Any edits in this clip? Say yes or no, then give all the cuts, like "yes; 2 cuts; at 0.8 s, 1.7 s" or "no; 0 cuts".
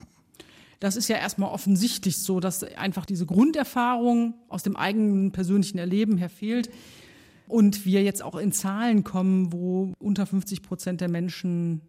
no; 0 cuts